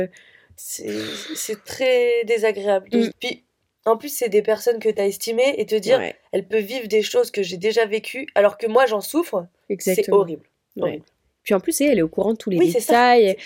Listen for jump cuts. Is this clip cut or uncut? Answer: cut